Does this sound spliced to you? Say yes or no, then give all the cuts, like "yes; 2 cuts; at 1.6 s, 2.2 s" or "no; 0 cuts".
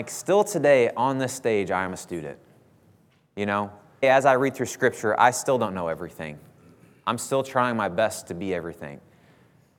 yes; 1 cut; at 4.0 s